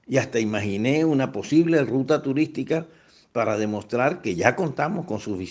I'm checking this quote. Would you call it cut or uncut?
uncut